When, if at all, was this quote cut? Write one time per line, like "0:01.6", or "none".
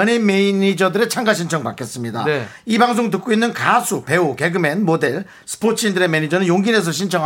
none